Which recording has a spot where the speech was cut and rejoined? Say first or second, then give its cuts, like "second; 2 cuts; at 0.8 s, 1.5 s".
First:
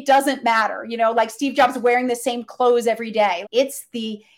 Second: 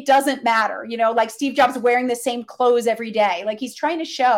first; 1 cut; at 3.4 s